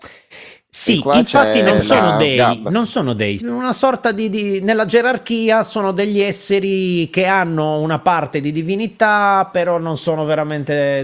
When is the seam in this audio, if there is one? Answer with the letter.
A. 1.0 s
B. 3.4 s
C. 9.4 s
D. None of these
B